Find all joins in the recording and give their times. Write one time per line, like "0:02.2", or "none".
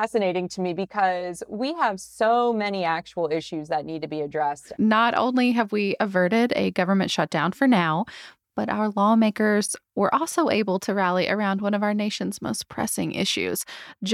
0:04.8